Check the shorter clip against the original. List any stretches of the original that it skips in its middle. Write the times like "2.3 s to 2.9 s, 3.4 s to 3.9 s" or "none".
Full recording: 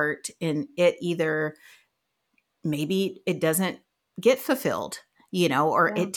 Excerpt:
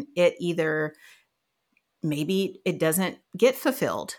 3.9 s to 4.1 s